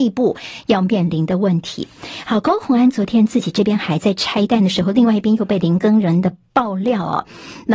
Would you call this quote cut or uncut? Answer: uncut